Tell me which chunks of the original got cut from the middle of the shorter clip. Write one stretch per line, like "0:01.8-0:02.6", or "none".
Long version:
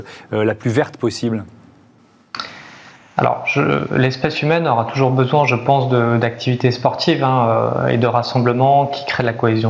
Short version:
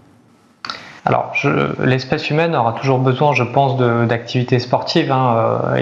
0:02.7-0:03.1